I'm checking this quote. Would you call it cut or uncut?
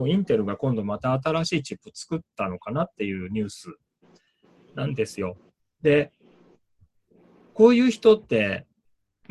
uncut